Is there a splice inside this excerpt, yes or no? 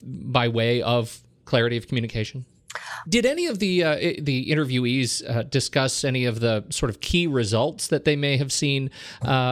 yes